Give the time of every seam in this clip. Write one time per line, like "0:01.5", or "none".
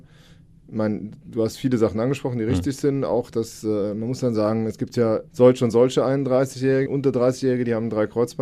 0:05.3
0:06.9